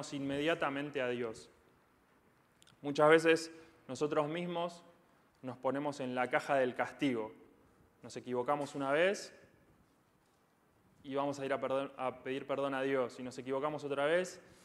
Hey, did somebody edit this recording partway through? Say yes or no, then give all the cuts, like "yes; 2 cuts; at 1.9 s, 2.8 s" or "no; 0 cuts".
no; 0 cuts